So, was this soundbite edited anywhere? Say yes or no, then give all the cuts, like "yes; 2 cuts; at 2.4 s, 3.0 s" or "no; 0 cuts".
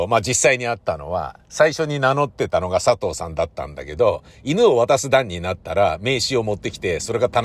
no; 0 cuts